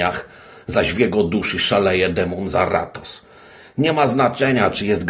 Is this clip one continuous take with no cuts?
yes; 0 cuts

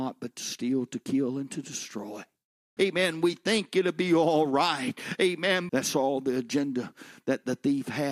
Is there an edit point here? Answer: yes; 2 cuts; at 2.8 s, 5.7 s

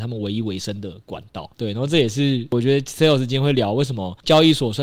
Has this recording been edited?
yes; 1 cut; at 1.5 s

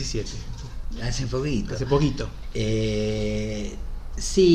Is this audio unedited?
yes; 0 cuts

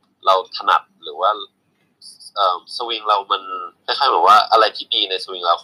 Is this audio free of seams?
no; 2 cuts; at 2.7 s, 3.8 s

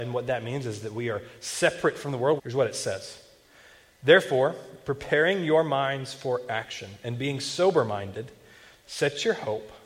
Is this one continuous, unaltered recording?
no; 1 cut; at 2.4 s

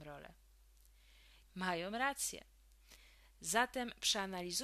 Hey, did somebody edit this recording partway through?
yes; 1 cut; at 1.4 s

